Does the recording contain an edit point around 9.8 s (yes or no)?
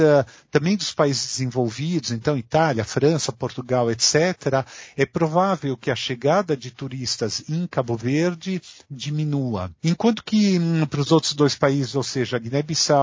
yes